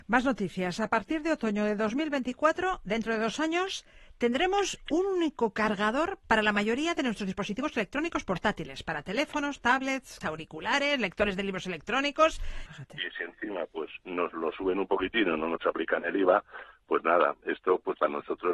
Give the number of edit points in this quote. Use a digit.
2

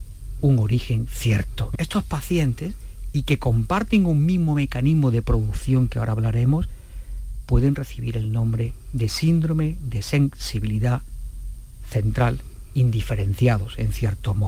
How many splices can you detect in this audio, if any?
1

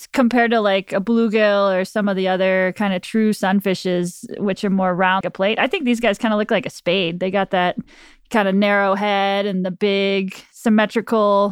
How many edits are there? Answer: 1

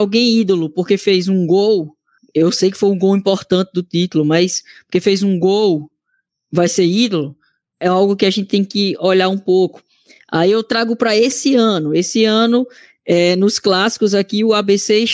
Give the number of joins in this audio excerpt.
0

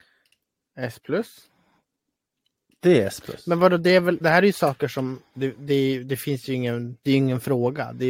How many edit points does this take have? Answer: 1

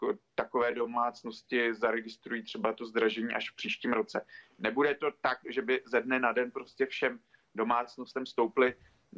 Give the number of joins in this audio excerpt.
1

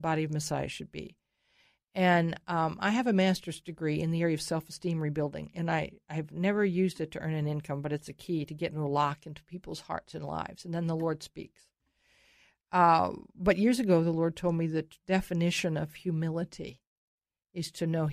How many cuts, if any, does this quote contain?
0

